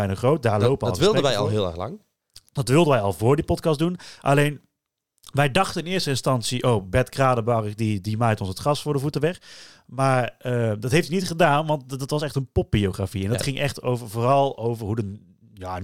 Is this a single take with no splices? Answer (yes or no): yes